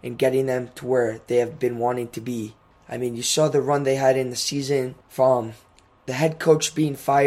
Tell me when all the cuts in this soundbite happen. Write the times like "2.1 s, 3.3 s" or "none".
2.7 s, 5.0 s

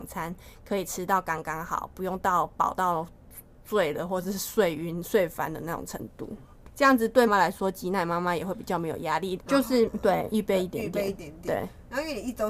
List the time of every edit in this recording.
7.3 s, 9.4 s

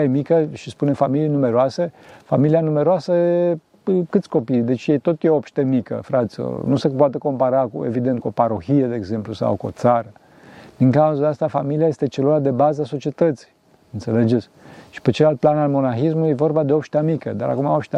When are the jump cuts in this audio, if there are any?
none

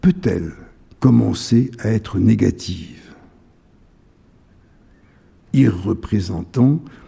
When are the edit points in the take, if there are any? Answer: 5.4 s

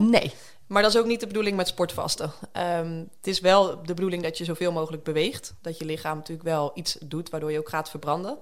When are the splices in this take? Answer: none

